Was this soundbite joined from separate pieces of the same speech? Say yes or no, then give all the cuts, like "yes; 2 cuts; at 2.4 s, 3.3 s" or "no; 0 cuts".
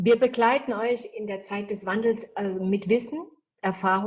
no; 0 cuts